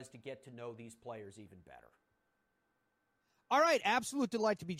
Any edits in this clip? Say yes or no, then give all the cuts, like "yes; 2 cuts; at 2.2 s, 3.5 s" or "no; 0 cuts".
no; 0 cuts